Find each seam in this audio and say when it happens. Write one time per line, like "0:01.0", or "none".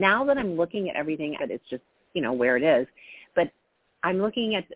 0:01.4